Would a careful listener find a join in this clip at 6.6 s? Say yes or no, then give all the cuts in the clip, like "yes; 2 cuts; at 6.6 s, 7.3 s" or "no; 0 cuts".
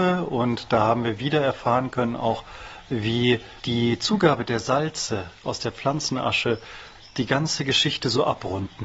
no; 1 cut; at 3.6 s